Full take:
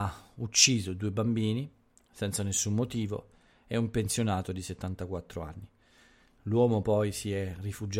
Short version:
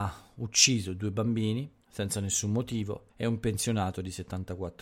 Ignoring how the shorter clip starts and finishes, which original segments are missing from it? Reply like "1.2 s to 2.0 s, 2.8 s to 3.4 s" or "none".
1.8 s to 2.0 s, 3.3 s to 3.6 s